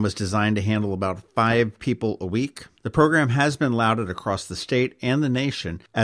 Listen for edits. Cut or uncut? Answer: uncut